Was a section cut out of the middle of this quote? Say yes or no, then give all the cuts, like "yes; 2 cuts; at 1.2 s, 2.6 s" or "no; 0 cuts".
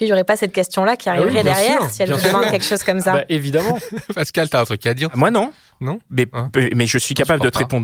no; 0 cuts